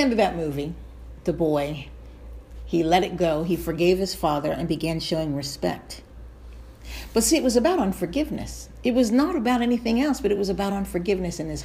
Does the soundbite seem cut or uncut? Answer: uncut